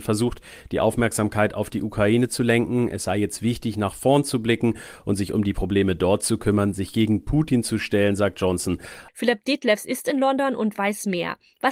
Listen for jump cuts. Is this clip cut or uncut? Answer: cut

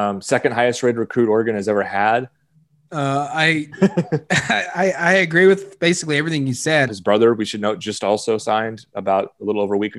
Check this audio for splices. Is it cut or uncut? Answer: cut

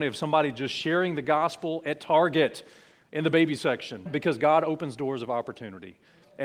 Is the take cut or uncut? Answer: cut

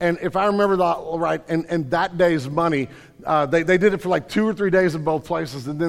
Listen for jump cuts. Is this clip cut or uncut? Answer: uncut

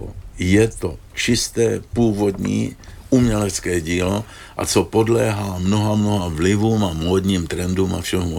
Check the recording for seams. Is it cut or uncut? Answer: uncut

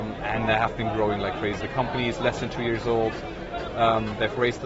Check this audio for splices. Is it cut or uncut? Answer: cut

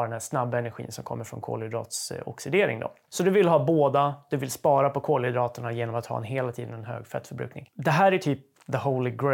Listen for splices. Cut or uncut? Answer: uncut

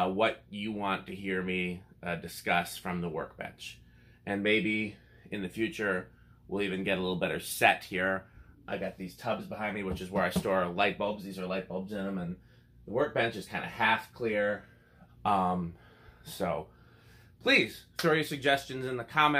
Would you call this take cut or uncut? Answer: cut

